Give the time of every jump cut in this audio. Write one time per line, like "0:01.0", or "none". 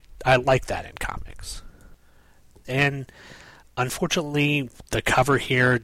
0:02.6